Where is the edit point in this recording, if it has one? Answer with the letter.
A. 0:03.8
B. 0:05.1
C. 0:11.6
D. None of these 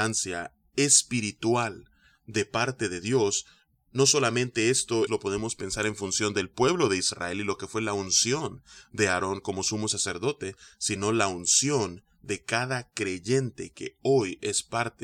B